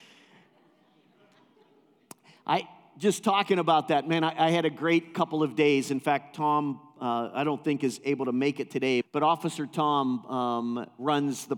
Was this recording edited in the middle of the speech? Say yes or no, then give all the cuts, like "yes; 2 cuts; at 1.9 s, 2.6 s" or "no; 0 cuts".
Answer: yes; 1 cut; at 9.0 s